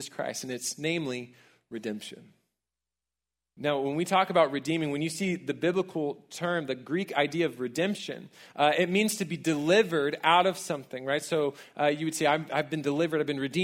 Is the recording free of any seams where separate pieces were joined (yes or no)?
yes